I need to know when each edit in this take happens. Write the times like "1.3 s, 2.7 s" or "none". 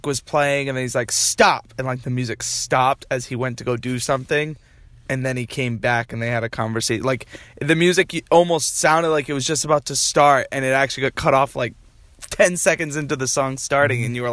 none